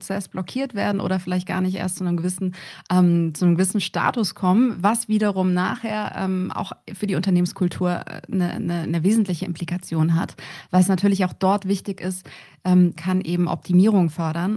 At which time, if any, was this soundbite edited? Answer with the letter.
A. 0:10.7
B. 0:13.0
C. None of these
B